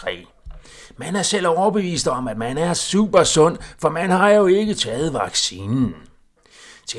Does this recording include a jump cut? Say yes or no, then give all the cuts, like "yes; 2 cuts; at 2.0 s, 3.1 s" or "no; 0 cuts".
no; 0 cuts